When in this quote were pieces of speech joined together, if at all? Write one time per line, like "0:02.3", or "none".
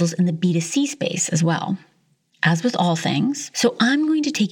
0:03.5